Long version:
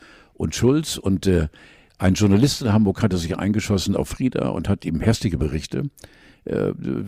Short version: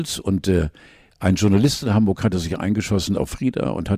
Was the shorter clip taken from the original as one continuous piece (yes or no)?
yes